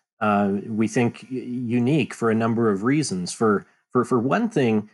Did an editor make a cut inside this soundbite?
no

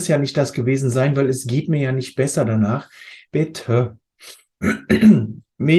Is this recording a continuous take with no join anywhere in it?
no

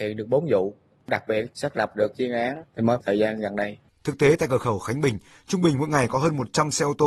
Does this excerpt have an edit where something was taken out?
yes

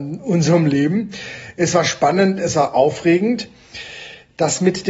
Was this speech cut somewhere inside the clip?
no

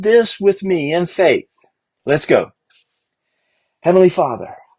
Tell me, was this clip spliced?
yes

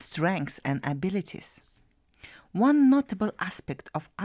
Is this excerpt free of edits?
yes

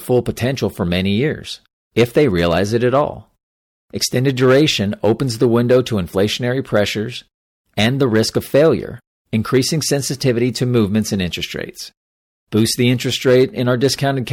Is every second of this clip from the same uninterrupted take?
yes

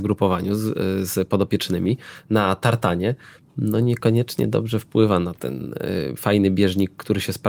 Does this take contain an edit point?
no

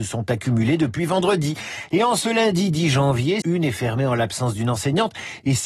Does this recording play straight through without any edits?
no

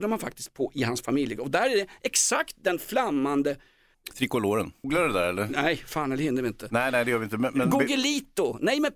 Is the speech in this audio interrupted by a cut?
yes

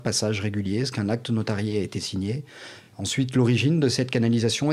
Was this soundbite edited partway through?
no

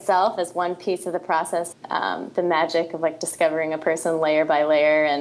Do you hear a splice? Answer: yes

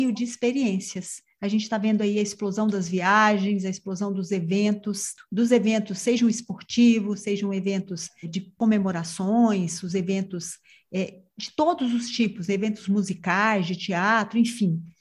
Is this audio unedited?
no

